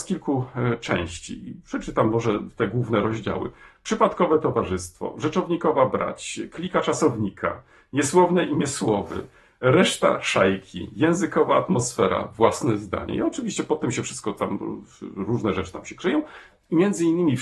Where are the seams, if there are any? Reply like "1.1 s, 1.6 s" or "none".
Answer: none